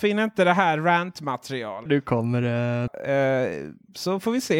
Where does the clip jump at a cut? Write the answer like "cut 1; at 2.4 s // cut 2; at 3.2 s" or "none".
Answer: cut 1; at 1.9 s // cut 2; at 2.9 s